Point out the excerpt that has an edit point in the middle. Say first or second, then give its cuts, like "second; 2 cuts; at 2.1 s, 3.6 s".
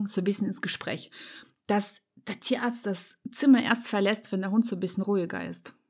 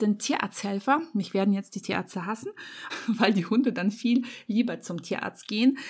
second; 1 cut; at 2.9 s